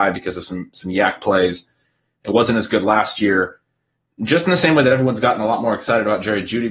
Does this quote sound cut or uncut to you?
uncut